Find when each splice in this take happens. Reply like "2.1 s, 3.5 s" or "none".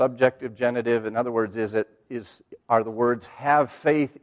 2.1 s